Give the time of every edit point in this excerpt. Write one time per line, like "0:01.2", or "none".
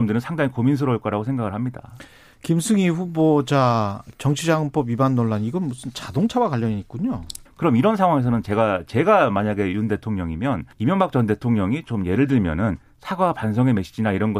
0:07.5
0:10.7